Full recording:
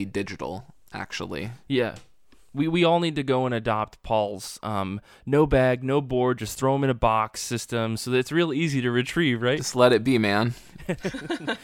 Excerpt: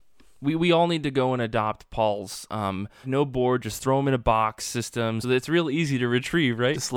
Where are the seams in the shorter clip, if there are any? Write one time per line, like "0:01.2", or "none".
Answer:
0:03.0
0:05.2